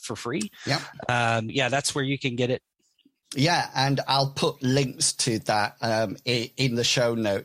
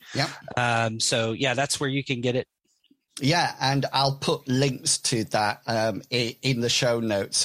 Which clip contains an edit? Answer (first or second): first